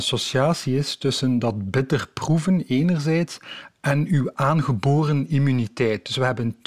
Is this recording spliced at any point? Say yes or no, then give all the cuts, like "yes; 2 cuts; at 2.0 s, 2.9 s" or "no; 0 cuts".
no; 0 cuts